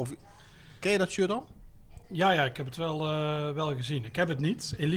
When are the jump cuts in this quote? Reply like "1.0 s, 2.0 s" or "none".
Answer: none